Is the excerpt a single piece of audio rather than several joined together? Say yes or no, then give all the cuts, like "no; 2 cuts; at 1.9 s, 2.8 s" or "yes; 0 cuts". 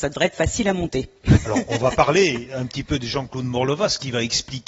yes; 0 cuts